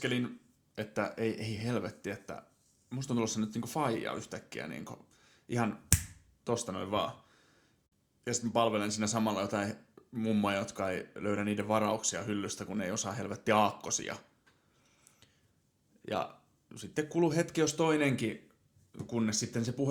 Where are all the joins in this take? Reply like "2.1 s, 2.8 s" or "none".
none